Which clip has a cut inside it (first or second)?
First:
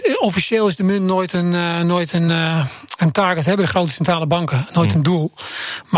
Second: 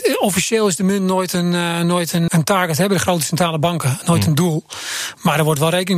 second